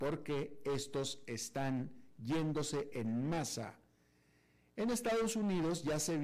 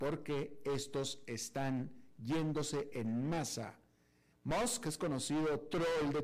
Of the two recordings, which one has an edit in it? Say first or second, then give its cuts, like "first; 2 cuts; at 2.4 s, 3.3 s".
second; 1 cut; at 4.3 s